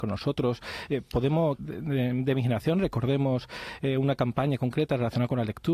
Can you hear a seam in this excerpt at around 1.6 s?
yes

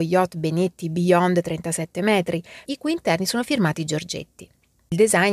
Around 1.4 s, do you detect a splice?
no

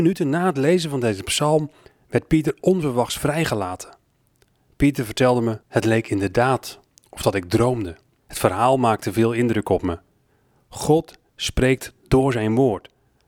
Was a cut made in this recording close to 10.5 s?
no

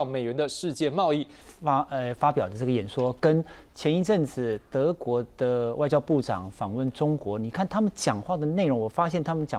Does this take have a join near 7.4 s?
no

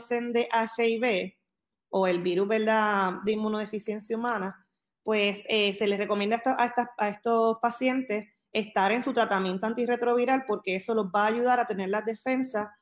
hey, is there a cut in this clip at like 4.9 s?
no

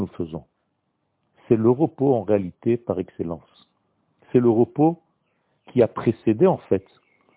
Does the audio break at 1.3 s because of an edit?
yes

